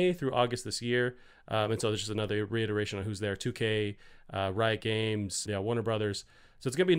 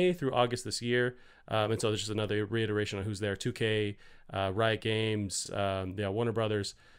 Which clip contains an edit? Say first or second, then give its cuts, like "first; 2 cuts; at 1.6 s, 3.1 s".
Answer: first; 1 cut; at 5.5 s